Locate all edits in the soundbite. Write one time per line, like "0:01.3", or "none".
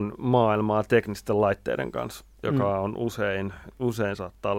none